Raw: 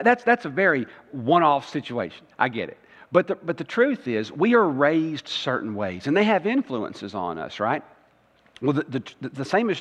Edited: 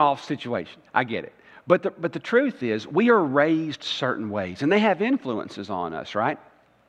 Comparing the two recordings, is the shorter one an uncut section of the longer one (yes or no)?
yes